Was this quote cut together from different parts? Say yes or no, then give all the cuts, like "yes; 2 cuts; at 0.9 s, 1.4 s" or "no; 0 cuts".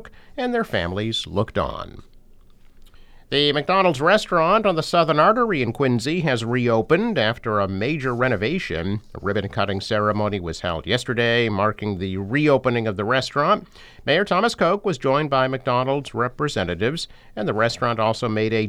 no; 0 cuts